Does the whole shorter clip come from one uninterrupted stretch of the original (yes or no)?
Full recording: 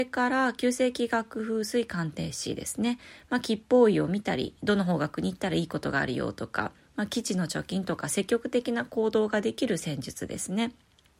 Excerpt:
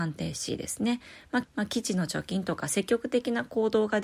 no